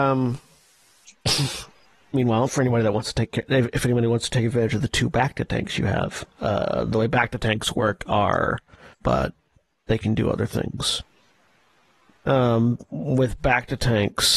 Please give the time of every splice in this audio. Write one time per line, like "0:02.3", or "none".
0:08.9